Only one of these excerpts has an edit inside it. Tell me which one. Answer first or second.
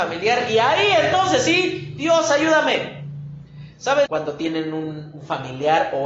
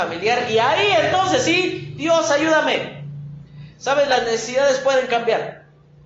first